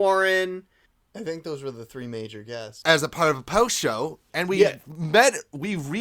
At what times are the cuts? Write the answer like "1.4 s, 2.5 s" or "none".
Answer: 2.8 s, 4.3 s